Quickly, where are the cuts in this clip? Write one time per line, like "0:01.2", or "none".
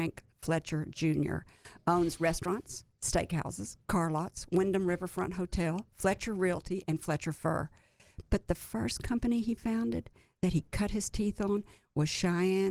none